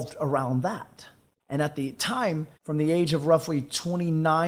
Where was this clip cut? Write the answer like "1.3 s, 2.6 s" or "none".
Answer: 1.4 s, 2.5 s

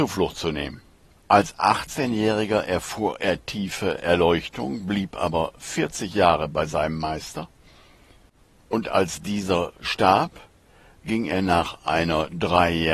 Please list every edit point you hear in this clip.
1.2 s

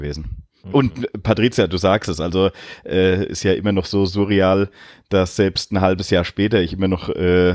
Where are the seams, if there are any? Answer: 3.3 s

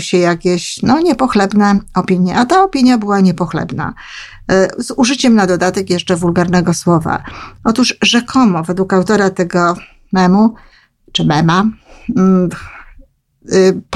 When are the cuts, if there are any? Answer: none

